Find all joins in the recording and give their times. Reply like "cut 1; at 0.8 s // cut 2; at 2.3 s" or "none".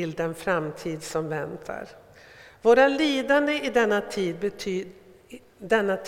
none